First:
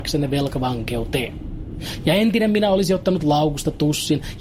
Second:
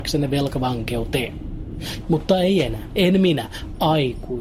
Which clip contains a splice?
second; 1 cut; at 2.0 s

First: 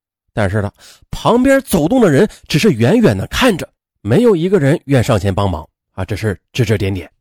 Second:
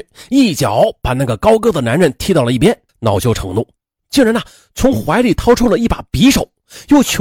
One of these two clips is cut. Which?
second; 1 cut; at 2.9 s

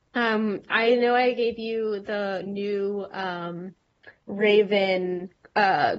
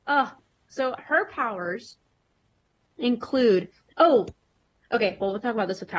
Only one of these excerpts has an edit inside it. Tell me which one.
first; 1 cut; at 4.2 s

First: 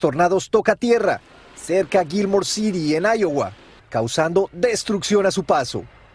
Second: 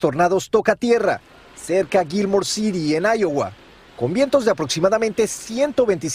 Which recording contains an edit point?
first; 1 cut; at 3.8 s

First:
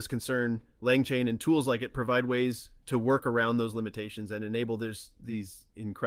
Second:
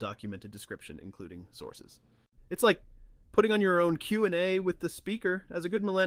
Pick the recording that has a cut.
second; 1 cut; at 2.4 s

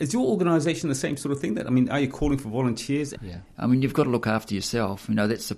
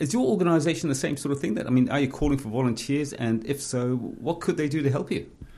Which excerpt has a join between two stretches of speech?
first; 1 cut; at 3.1 s

